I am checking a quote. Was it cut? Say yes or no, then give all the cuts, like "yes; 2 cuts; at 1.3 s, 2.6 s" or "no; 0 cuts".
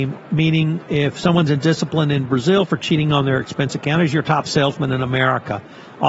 no; 0 cuts